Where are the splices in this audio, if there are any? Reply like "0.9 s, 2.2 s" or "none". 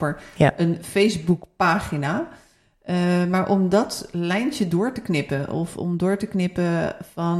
none

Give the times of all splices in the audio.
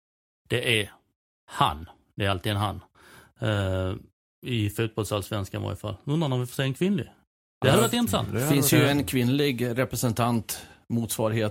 none

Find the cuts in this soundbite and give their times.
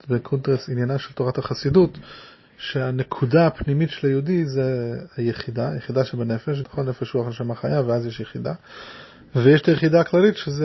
6.6 s

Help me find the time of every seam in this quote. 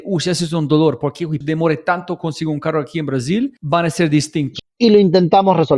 1.4 s, 4.6 s

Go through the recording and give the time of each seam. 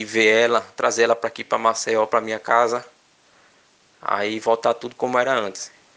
none

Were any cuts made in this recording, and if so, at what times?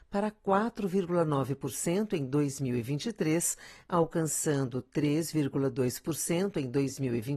none

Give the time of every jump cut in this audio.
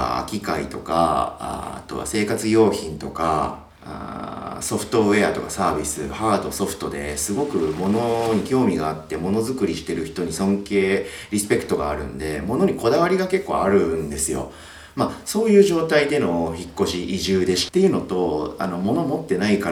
3.8 s, 17.7 s

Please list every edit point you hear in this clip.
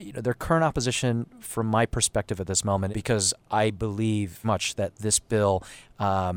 2.9 s, 4.4 s

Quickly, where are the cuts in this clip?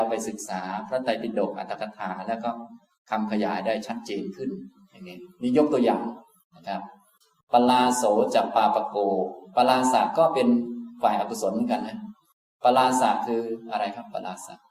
none

